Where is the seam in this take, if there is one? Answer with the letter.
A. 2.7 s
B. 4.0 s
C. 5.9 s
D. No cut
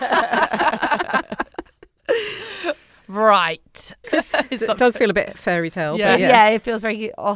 B